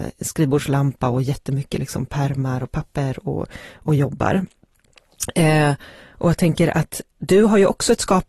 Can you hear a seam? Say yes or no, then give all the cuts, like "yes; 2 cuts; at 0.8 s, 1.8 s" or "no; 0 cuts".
no; 0 cuts